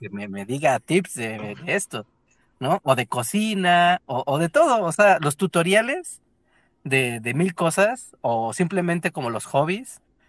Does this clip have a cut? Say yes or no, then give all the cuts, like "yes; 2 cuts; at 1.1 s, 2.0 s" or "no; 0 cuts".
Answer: no; 0 cuts